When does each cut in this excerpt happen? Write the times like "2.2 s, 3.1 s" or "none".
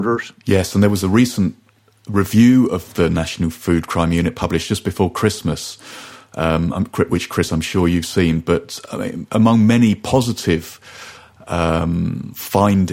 none